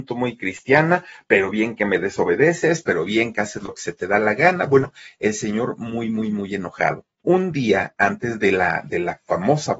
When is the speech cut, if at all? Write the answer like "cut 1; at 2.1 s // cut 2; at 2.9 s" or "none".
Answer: cut 1; at 7.1 s